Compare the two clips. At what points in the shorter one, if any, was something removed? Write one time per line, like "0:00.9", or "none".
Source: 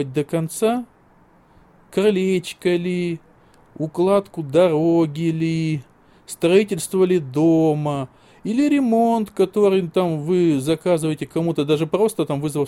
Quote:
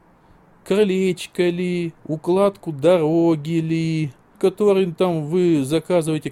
0:02.0
0:04.4